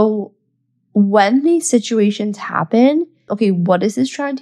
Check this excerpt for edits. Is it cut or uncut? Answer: cut